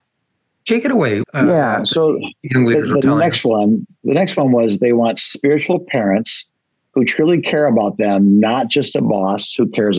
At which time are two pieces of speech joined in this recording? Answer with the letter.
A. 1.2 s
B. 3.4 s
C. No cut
A